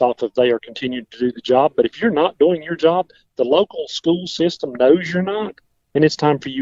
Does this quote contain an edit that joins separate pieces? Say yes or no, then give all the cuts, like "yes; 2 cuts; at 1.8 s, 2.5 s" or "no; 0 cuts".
no; 0 cuts